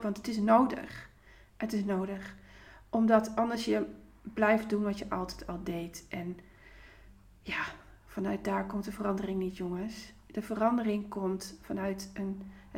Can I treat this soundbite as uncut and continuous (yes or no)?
yes